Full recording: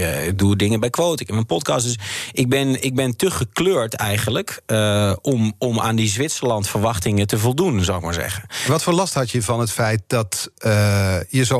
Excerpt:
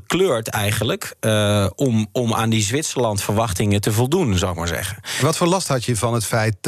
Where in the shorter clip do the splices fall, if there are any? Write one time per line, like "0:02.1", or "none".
none